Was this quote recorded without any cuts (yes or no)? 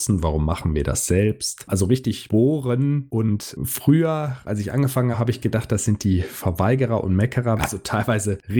no